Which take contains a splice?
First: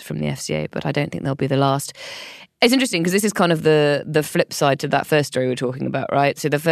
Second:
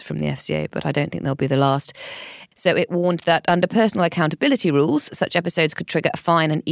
second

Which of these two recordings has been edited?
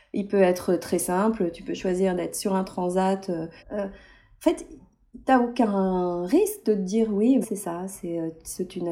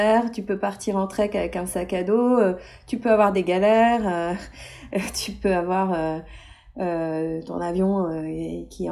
first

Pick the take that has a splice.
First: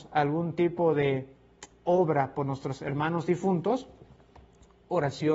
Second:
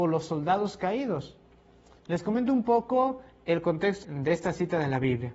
second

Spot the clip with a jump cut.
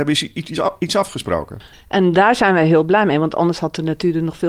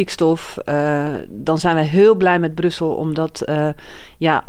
first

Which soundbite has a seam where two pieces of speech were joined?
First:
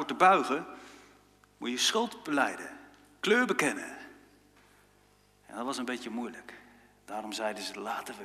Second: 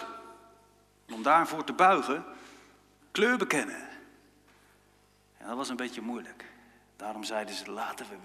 second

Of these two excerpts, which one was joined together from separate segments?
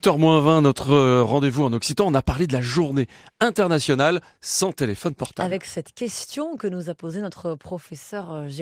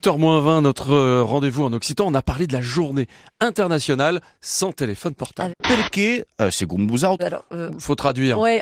second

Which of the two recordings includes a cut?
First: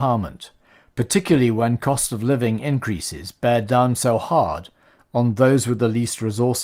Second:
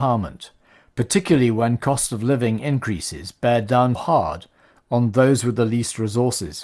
second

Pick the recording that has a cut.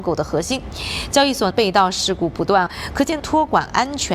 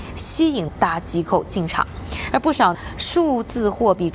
second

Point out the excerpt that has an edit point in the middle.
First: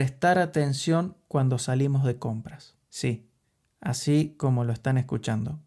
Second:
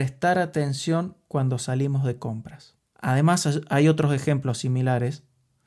second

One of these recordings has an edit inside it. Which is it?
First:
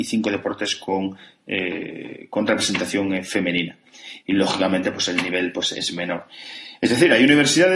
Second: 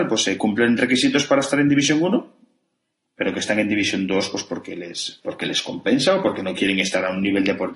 first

